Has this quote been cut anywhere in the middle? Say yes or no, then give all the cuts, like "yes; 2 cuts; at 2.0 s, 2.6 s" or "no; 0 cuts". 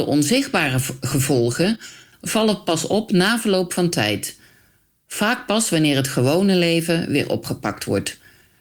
no; 0 cuts